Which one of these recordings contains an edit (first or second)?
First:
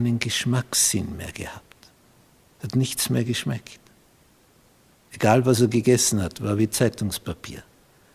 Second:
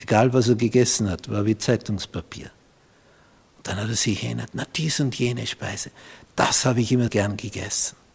second